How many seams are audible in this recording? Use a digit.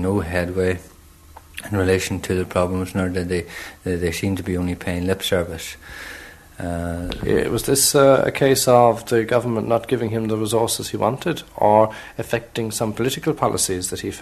1